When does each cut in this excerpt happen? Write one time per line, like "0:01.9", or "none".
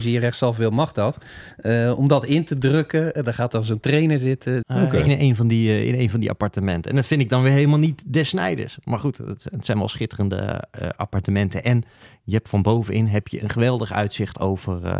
0:04.6